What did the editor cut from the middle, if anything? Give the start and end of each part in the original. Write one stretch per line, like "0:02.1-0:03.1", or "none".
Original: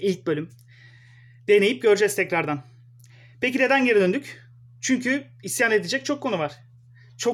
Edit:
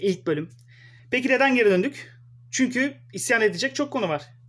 0:01.0-0:03.3